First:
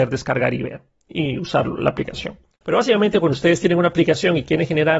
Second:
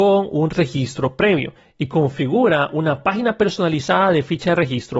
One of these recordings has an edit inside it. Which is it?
first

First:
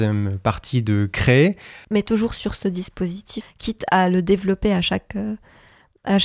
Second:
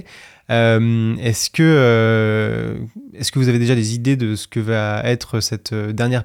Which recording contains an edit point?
first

